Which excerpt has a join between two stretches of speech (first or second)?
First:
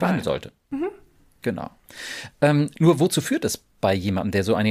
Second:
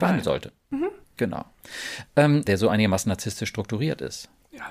second